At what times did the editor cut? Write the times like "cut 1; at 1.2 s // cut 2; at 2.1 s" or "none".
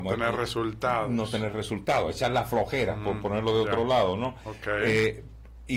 none